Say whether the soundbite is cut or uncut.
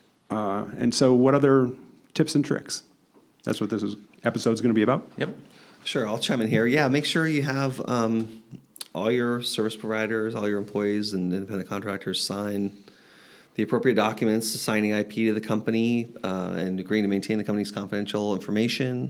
uncut